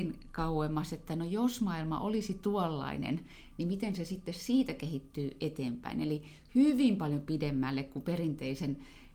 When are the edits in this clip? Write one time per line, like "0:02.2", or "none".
none